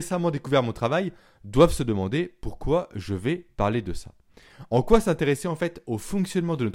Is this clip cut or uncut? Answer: uncut